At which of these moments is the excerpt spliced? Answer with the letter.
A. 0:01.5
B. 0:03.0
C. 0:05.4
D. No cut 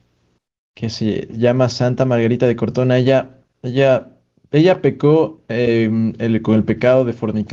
D